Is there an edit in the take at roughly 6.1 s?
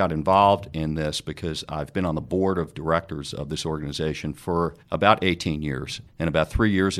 yes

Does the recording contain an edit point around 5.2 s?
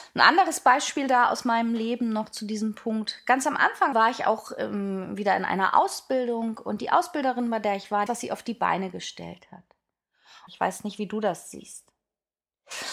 no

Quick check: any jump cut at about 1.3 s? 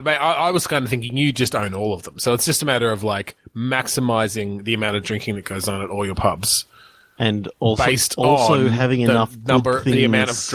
no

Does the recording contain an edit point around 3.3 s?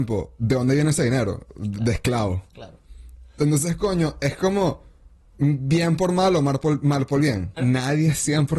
no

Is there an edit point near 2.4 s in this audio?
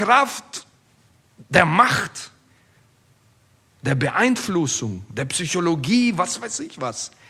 no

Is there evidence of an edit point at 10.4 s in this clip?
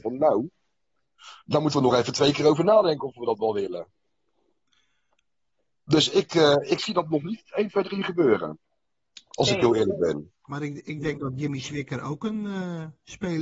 no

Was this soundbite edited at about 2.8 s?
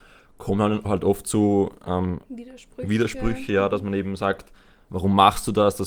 no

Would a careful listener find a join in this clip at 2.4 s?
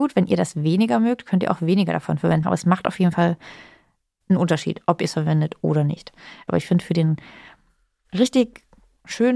yes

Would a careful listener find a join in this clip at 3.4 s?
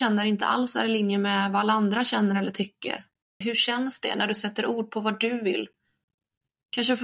yes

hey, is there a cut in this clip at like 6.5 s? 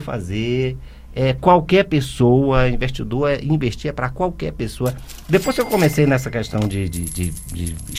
no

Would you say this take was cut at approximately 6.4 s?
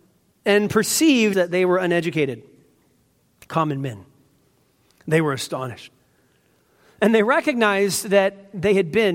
no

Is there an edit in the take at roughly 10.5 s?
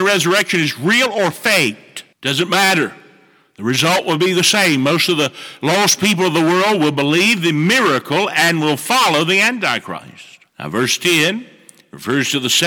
yes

